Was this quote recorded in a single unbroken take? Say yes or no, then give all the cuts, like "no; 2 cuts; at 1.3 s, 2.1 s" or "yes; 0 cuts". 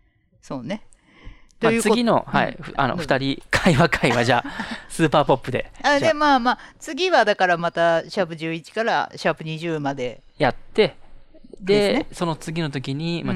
yes; 0 cuts